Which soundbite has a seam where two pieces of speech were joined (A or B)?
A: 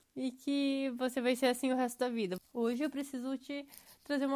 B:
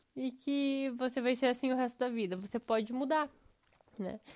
A